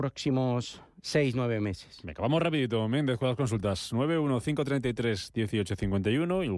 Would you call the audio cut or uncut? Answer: uncut